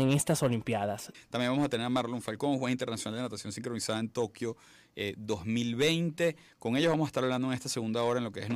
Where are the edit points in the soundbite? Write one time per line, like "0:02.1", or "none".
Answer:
0:01.1